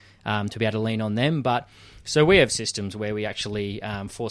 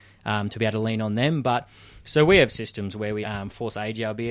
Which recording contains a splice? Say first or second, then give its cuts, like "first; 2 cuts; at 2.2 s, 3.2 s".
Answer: second; 1 cut; at 3.2 s